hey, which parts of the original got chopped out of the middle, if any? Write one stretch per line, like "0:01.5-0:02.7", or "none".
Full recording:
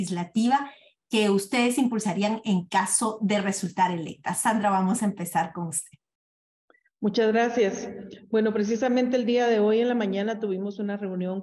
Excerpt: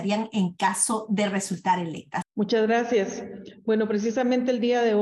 0:04.3-0:06.9